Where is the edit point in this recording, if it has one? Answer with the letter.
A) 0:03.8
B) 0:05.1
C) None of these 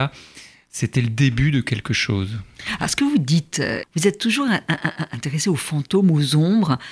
A